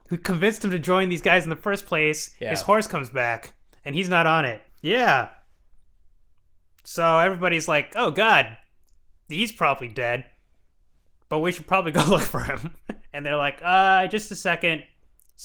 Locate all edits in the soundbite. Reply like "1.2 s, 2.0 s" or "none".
4.7 s, 13.1 s